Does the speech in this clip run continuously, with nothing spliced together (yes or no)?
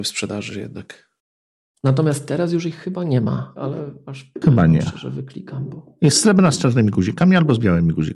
no